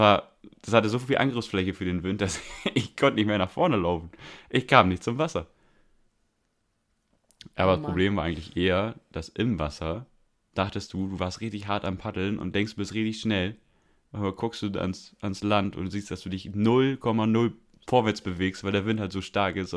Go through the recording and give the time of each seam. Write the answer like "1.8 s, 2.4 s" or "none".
none

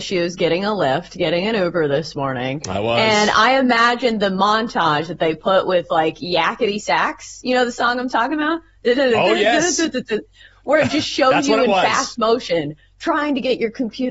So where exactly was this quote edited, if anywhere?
none

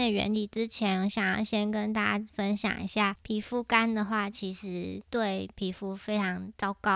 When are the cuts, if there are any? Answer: none

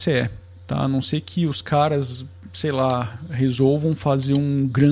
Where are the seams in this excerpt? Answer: none

